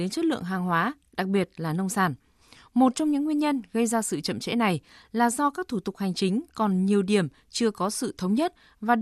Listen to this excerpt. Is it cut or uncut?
uncut